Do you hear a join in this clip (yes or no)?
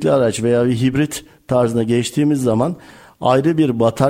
no